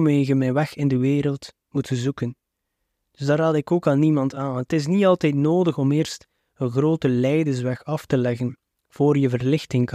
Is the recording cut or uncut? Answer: uncut